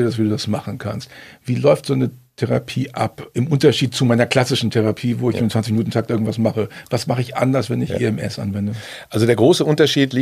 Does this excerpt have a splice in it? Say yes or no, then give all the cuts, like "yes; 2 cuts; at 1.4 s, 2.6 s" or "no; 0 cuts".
no; 0 cuts